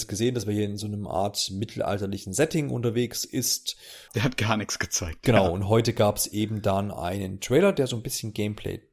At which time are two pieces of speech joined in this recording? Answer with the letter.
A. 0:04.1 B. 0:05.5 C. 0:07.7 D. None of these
A